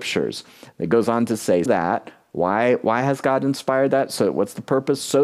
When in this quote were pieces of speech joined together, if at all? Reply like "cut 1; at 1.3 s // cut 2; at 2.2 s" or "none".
cut 1; at 1.7 s